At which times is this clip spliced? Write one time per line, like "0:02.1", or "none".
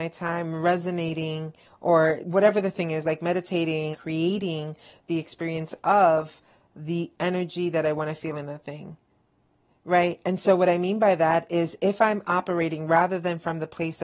0:02.2
0:03.9

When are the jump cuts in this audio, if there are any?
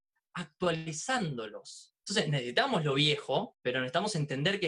0:02.0

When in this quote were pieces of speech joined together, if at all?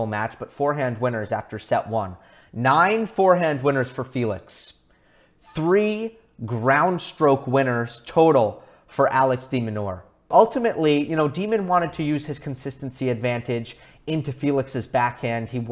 none

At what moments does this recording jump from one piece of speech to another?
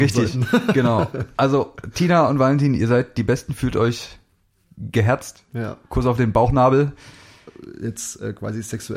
none

